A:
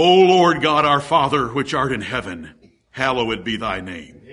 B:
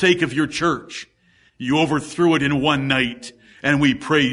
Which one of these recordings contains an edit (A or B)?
B